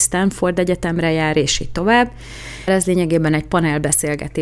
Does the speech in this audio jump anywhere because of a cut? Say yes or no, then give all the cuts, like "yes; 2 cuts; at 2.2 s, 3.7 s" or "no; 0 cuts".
yes; 1 cut; at 2.7 s